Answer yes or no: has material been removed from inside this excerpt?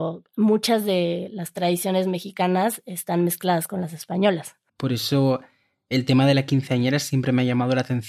yes